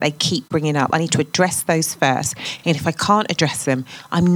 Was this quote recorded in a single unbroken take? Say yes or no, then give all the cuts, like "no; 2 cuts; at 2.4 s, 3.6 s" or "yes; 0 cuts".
yes; 0 cuts